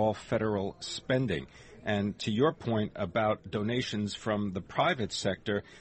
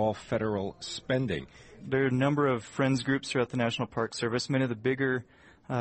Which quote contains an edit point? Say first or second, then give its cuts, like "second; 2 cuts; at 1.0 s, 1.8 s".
second; 1 cut; at 1.8 s